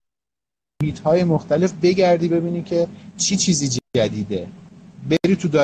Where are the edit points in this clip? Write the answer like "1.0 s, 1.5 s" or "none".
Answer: 3.9 s